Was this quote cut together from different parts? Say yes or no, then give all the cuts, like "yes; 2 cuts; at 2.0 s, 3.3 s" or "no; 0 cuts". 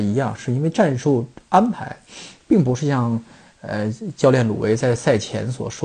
no; 0 cuts